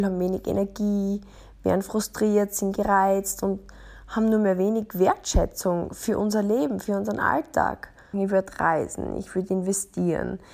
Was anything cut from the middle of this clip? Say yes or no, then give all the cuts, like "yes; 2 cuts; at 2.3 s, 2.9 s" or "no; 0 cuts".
yes; 1 cut; at 8.1 s